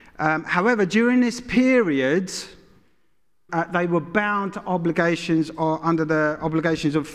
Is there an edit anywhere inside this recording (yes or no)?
yes